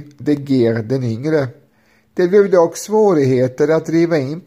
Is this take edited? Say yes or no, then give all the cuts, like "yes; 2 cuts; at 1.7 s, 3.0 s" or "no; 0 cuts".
no; 0 cuts